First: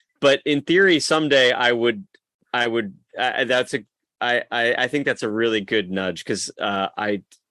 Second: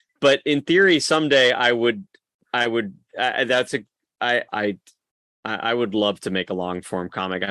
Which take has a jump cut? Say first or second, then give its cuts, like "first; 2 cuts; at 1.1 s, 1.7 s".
second; 1 cut; at 4.5 s